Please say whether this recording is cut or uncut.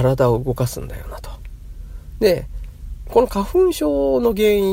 cut